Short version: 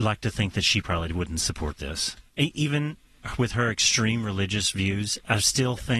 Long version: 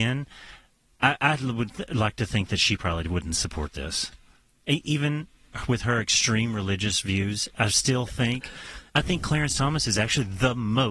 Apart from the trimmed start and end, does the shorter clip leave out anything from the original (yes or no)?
yes